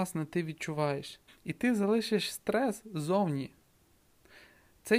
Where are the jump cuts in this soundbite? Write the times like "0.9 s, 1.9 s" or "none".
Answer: 1.3 s